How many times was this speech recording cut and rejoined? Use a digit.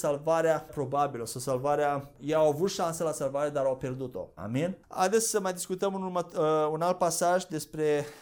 1